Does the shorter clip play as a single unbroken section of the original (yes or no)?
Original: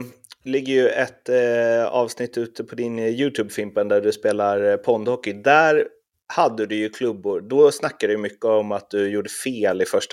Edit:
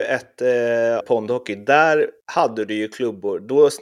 no